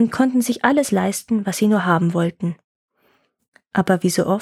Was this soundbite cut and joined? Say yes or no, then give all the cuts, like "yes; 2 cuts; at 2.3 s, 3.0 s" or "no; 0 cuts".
no; 0 cuts